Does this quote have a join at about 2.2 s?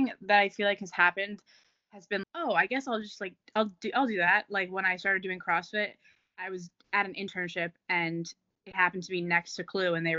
yes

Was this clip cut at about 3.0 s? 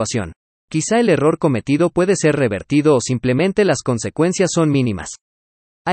no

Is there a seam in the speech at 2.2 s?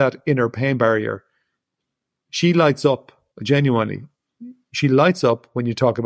no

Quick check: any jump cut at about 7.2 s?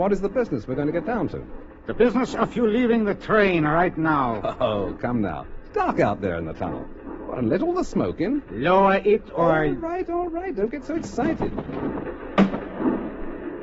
yes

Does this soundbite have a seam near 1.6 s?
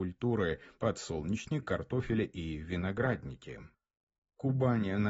yes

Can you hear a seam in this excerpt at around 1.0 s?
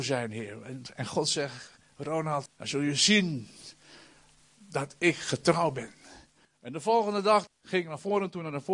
no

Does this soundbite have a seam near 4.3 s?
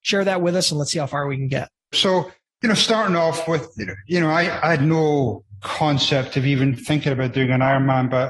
no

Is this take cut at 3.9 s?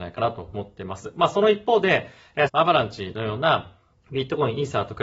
yes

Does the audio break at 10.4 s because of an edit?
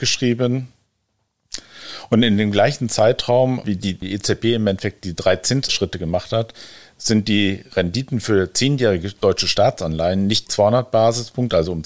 yes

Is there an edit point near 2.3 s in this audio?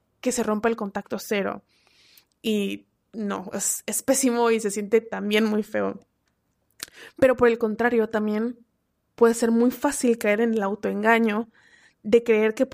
yes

